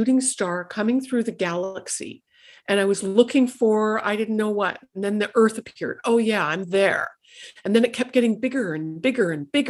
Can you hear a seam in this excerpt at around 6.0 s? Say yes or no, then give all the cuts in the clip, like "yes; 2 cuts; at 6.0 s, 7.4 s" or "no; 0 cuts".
no; 0 cuts